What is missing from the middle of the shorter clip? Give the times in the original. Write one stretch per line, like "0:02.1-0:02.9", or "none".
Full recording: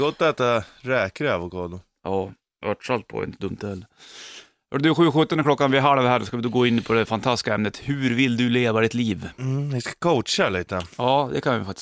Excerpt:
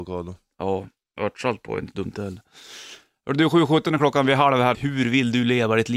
0:06.2-0:07.8